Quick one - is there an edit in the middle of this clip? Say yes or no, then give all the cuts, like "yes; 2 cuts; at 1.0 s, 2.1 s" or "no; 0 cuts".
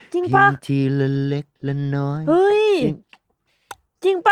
yes; 1 cut; at 1.5 s